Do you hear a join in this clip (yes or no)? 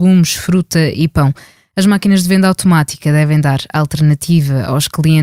yes